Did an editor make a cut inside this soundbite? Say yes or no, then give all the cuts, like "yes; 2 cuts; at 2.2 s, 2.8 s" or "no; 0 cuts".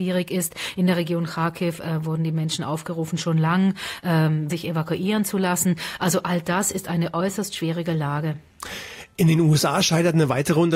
yes; 1 cut; at 4.5 s